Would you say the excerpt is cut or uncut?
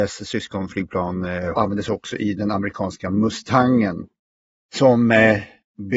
cut